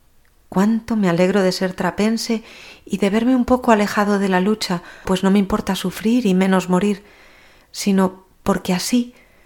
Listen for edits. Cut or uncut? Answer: cut